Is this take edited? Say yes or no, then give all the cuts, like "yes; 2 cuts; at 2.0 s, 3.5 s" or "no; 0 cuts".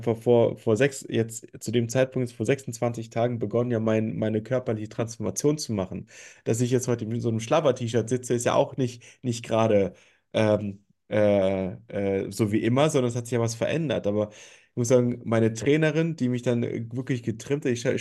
no; 0 cuts